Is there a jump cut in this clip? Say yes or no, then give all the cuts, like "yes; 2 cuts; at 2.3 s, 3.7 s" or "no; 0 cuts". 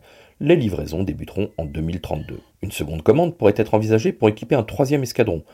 yes; 1 cut; at 2.5 s